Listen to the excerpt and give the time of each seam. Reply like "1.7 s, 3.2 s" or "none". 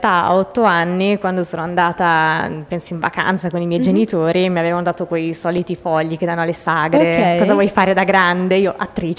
none